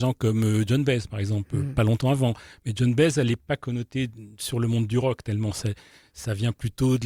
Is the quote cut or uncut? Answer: uncut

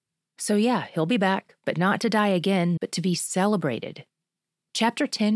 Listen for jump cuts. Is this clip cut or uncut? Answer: cut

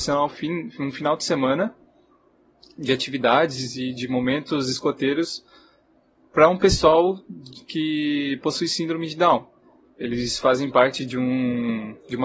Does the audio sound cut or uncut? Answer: uncut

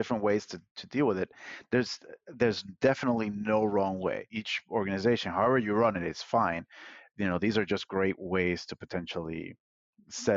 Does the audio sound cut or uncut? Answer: uncut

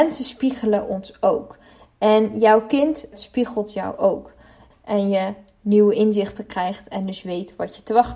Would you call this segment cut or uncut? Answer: cut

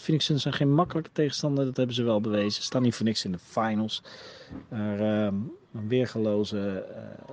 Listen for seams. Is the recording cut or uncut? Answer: uncut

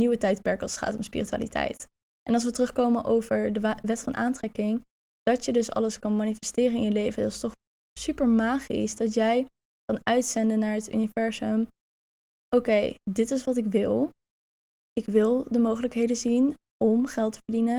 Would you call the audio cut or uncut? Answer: uncut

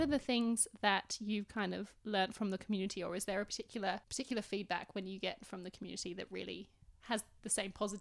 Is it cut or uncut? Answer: cut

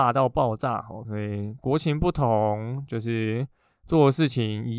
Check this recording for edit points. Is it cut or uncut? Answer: cut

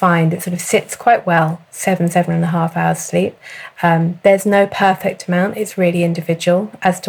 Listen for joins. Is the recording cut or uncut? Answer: uncut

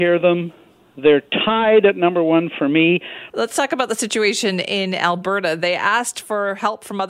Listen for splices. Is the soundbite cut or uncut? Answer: cut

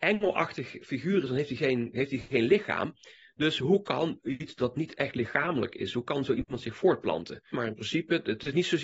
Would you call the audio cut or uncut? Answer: cut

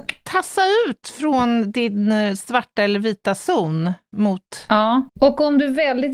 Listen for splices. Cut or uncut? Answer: cut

